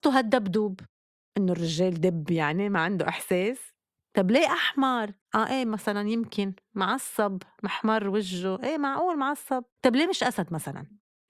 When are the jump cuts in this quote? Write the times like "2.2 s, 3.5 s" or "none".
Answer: 5.2 s, 9.7 s